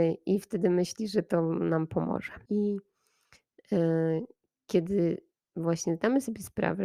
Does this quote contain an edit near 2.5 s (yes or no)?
yes